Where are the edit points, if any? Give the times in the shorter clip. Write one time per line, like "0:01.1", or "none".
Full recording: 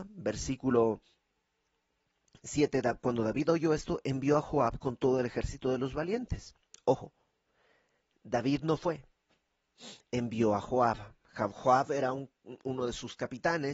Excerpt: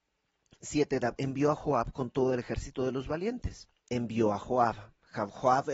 0:01.2
0:03.8

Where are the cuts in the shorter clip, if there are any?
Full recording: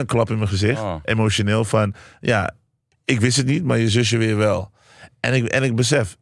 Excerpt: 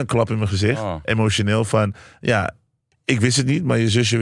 none

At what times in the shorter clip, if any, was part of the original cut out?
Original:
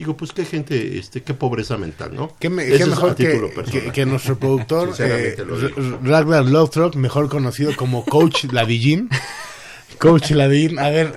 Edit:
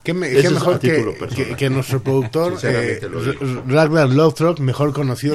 none

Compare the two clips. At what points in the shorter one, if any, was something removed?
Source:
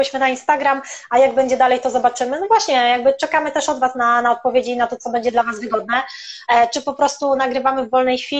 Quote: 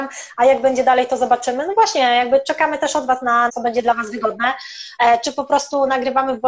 0:03.5

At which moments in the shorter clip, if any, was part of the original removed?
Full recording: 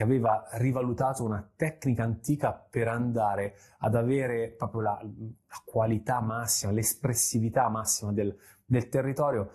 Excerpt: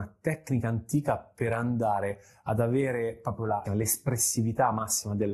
0:03.7

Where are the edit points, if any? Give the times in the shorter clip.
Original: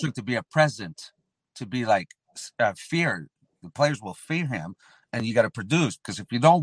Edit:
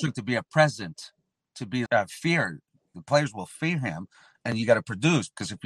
0:01.9

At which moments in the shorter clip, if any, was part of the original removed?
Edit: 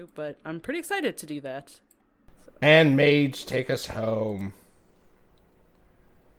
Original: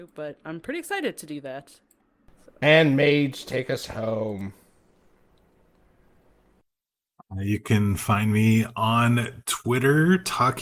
none

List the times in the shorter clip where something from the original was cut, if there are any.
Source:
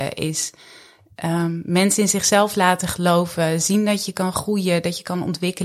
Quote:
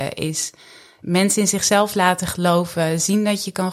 0:01.0

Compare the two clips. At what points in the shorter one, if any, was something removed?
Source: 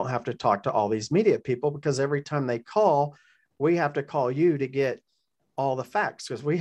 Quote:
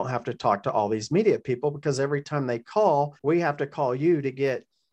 0:03.2

